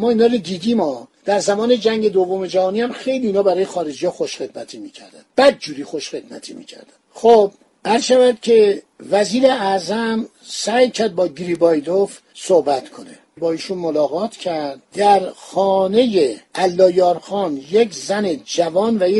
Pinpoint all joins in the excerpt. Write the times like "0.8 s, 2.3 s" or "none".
5.3 s

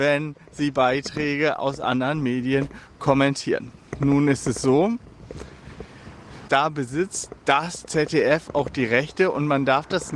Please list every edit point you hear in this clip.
6.5 s

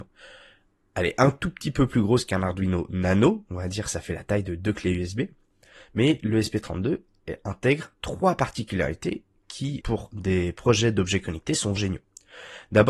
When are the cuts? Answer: 9.8 s, 11.8 s

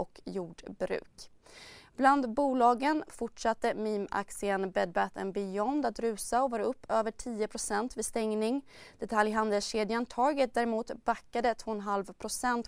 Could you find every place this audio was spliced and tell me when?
none

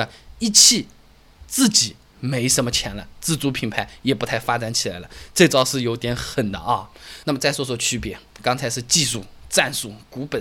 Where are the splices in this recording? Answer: 7.2 s

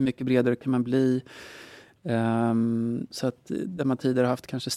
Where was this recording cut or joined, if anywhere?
3.1 s

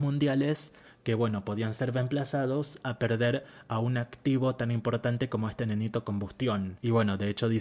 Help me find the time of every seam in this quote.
none

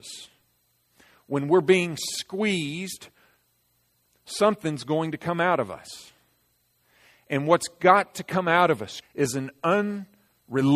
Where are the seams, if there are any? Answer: 9.0 s

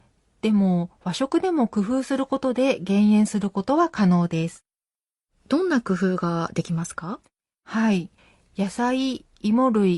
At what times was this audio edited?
none

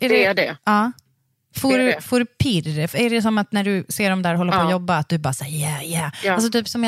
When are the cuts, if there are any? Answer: none

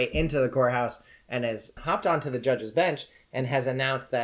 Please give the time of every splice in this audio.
1.8 s

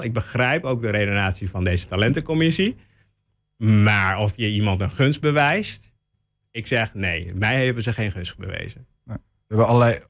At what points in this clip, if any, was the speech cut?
none

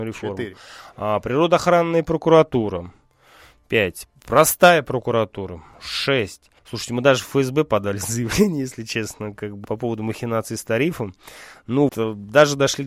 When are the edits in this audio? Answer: 6.6 s, 9.6 s, 11.9 s

